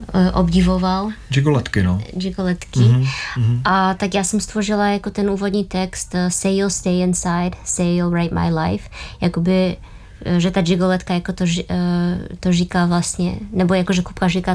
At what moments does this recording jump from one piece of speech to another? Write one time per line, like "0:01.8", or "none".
none